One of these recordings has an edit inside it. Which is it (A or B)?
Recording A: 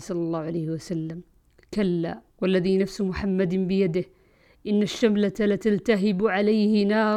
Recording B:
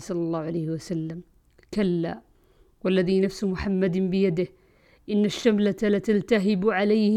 A